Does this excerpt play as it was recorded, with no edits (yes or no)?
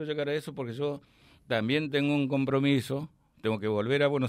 yes